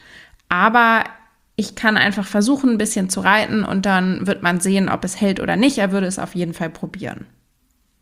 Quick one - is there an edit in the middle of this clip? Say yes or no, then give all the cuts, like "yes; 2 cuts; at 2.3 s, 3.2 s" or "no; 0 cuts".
no; 0 cuts